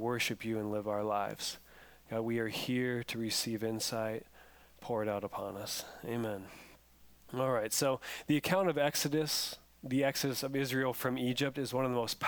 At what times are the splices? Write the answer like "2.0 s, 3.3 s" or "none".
none